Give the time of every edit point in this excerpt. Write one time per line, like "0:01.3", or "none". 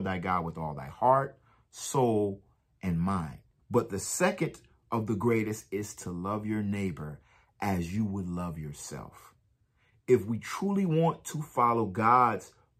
0:03.6